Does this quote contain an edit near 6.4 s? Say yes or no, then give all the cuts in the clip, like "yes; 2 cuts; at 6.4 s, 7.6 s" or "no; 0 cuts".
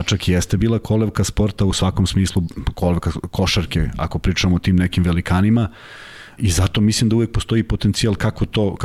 yes; 1 cut; at 6.4 s